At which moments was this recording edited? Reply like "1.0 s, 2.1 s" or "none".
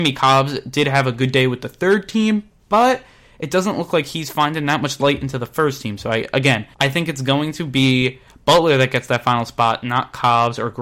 6.7 s